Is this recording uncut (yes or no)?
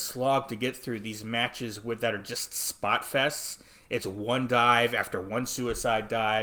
yes